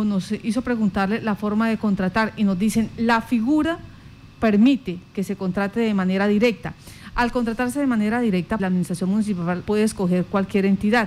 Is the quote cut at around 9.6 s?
yes; 2 cuts; at 8.6 s, 9.6 s

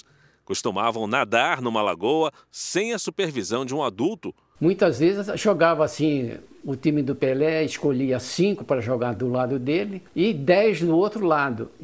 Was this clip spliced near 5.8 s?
no; 2 cuts; at 4.6 s, 10.1 s

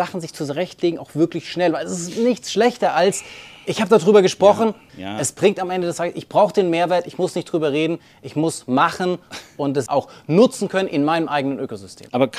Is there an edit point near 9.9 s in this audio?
yes; 2 cuts; at 4.9 s, 9.9 s

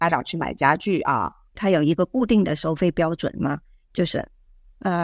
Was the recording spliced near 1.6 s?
yes; 1 cut; at 1.6 s

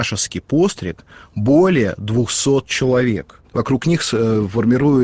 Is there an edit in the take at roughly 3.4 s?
yes; 1 cut; at 3.4 s

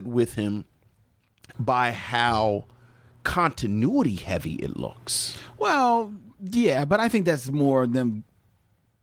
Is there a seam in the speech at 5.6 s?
no; 1 cut; at 1.5 s

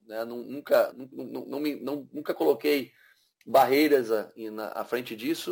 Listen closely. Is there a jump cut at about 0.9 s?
yes; 1 cut; at 0.9 s

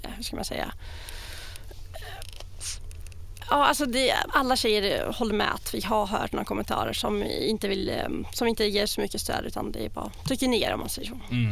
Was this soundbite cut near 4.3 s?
yes; 1 cut; at 4.3 s

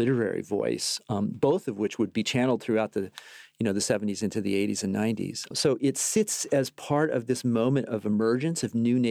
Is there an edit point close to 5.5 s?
yes; 1 cut; at 5.5 s

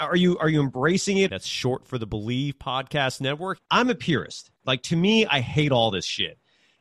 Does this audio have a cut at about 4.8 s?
no; 2 cuts; at 1.3 s, 3.6 s

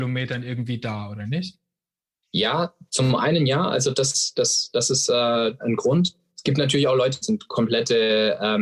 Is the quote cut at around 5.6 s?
yes; 2 cuts; at 5.6 s, 7.2 s

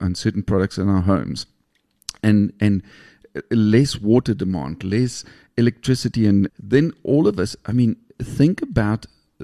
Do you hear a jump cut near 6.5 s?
yes; 1 cut; at 6.5 s

